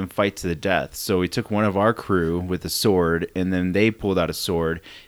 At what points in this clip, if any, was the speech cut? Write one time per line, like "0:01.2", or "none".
none